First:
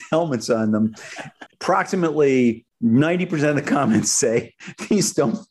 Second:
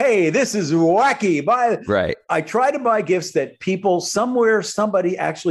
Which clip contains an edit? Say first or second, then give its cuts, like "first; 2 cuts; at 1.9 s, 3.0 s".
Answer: first; 1 cut; at 1.5 s